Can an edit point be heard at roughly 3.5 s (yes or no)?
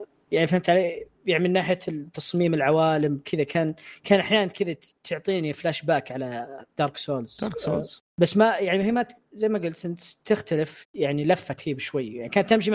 no